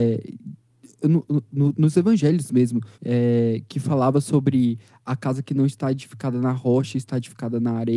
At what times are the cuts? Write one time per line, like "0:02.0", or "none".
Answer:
0:02.9